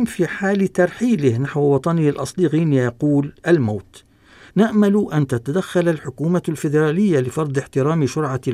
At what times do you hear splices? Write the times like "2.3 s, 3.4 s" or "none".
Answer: 4.5 s